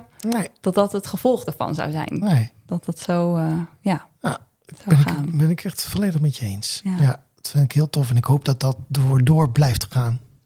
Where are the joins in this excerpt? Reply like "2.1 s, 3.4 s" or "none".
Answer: none